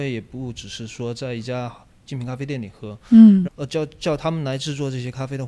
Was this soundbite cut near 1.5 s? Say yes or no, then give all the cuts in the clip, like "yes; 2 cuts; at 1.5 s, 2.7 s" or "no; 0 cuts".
no; 1 cut; at 3.5 s